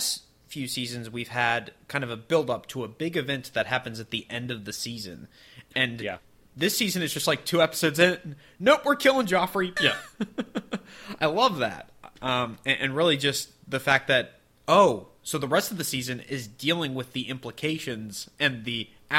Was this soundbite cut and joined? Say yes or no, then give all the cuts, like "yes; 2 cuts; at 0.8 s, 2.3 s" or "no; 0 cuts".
yes; 1 cut; at 9.8 s